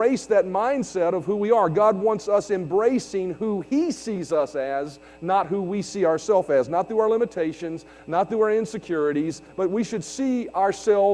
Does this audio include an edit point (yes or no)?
yes